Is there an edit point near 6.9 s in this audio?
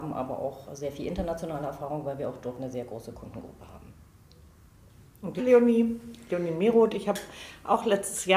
no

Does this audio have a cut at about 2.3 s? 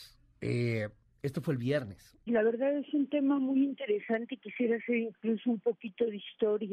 yes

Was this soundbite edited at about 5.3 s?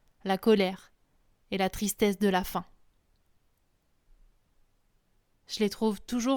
yes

